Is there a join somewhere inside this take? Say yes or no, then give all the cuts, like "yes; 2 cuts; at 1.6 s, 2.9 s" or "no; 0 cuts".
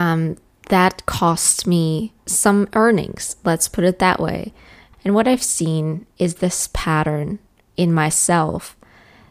yes; 1 cut; at 4.9 s